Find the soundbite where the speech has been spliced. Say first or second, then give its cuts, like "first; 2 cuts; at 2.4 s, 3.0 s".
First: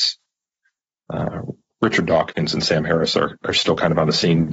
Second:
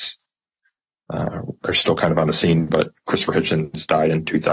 second; 1 cut; at 1.6 s